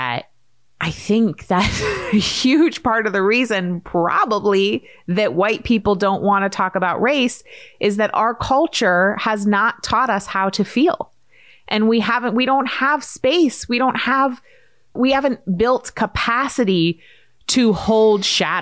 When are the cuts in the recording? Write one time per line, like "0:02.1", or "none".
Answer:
none